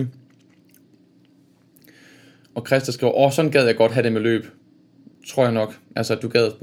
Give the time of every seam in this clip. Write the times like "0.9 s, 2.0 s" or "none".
none